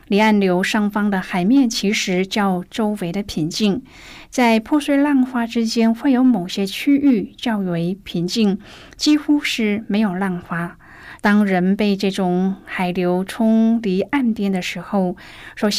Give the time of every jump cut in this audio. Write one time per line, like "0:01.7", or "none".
0:11.2